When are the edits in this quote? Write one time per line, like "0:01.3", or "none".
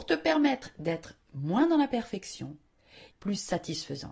0:03.1